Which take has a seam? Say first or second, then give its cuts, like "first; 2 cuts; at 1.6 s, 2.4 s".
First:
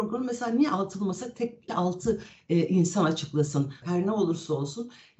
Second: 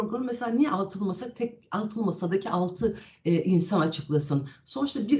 first; 2 cuts; at 1.7 s, 3.8 s